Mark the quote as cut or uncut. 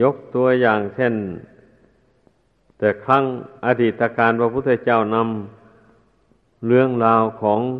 cut